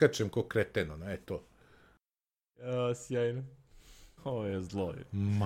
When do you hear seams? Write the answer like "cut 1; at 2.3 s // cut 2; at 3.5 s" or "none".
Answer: cut 1; at 4.2 s